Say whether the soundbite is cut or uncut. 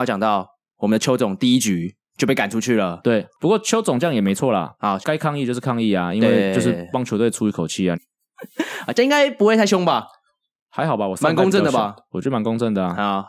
cut